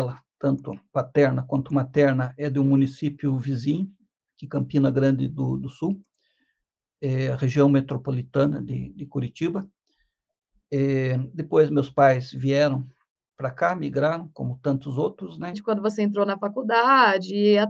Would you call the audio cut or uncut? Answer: cut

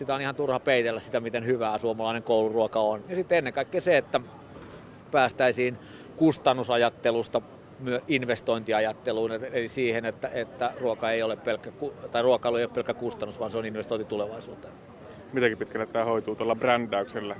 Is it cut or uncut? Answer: cut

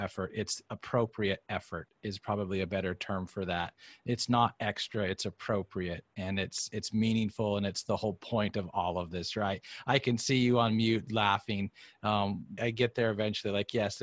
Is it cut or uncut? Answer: cut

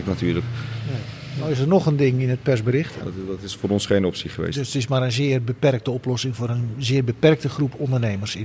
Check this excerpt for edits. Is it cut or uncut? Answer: cut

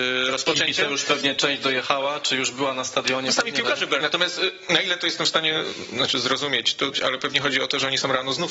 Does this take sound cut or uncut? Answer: cut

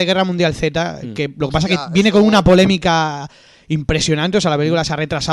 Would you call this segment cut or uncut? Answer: uncut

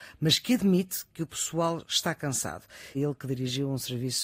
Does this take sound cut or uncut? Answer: cut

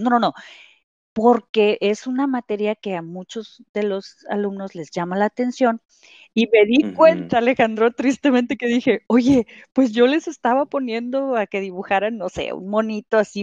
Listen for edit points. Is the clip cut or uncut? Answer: uncut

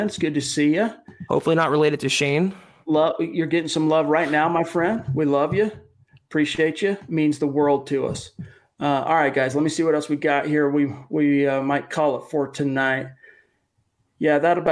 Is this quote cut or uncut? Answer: uncut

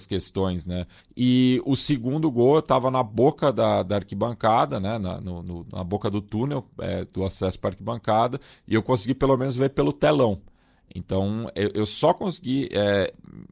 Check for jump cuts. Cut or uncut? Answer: cut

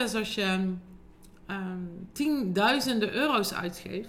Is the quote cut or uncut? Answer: uncut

